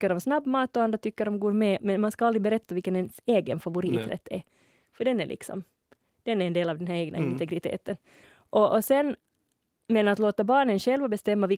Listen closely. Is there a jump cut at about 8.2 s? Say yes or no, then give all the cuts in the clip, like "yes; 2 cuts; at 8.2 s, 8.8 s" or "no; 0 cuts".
yes; 2 cuts; at 1.8 s, 8.2 s